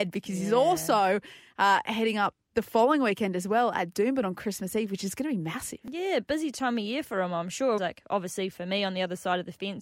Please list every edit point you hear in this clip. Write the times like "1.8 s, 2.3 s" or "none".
7.8 s